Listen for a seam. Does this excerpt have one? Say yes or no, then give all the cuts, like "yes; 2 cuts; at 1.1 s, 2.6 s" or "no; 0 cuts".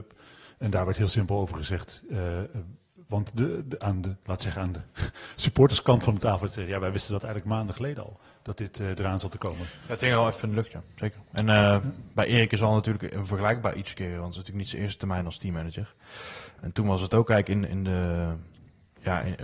no; 0 cuts